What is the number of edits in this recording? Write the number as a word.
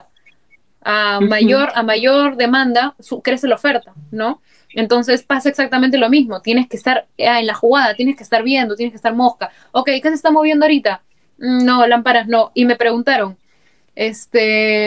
zero